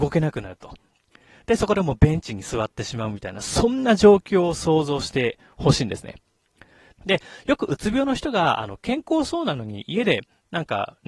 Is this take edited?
yes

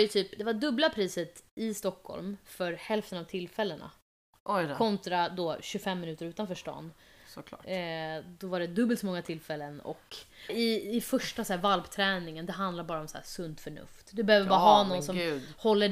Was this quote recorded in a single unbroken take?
no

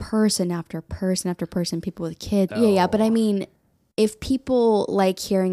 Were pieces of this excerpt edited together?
yes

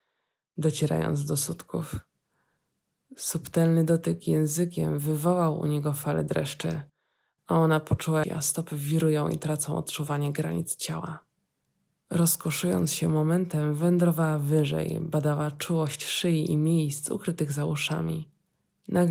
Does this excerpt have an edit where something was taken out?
yes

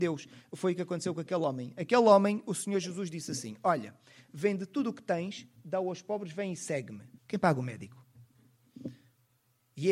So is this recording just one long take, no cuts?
no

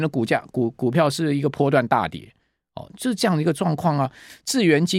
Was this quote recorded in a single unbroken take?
yes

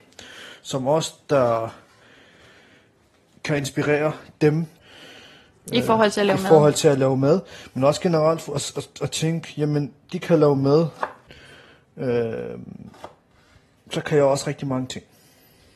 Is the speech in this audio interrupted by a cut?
no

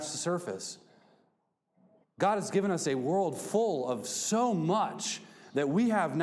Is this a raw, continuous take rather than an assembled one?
no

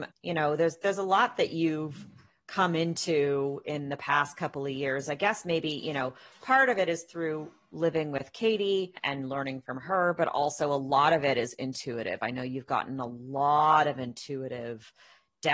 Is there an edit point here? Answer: no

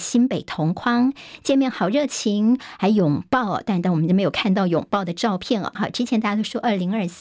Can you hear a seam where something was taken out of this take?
yes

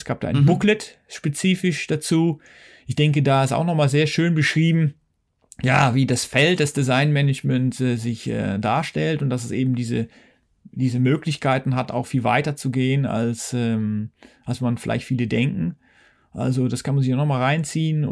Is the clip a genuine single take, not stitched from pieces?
yes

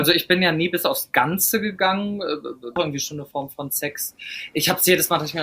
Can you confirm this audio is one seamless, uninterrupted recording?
no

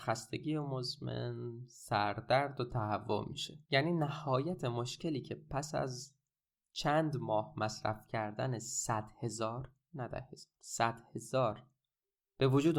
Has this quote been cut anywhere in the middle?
yes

